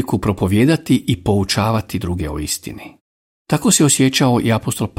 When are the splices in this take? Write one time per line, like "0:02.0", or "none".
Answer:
0:03.3

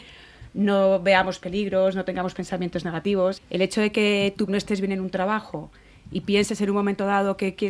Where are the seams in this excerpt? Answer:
0:03.4
0:04.5

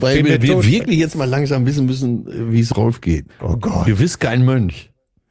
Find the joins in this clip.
0:03.3

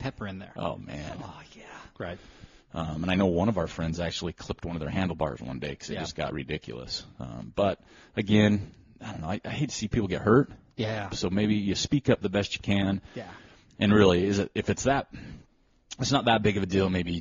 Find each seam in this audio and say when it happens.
0:01.9

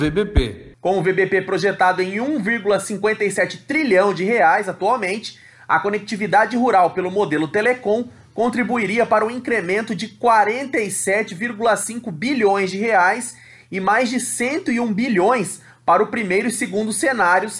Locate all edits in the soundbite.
none

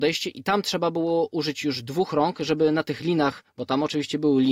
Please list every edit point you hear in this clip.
none

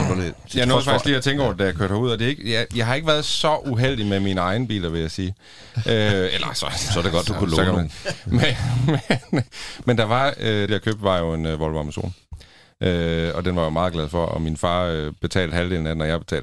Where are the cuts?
0:10.7

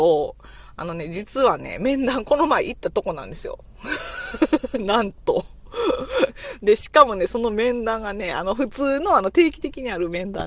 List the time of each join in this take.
none

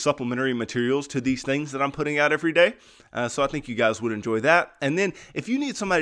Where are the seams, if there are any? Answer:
none

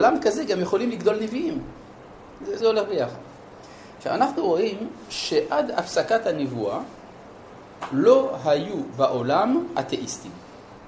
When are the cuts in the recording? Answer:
0:02.6

